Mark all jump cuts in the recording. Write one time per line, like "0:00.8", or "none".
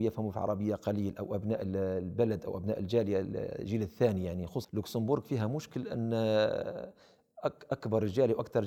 0:04.6